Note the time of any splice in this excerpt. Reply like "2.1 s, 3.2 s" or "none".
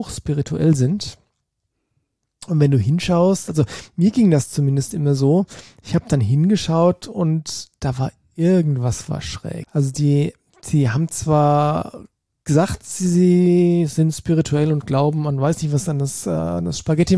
9.6 s